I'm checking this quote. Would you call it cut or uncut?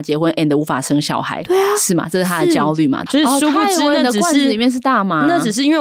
cut